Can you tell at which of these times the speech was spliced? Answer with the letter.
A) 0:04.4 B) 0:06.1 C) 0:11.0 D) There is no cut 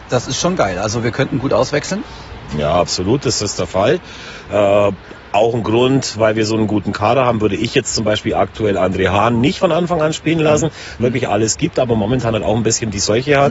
C